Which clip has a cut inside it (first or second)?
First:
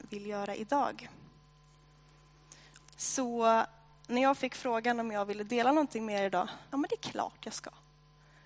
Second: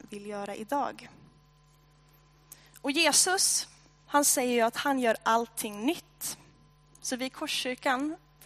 first